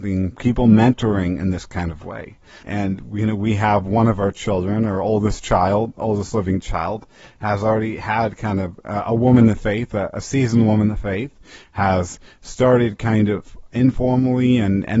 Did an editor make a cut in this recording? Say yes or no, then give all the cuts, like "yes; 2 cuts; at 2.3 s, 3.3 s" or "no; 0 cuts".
yes; 1 cut; at 2.6 s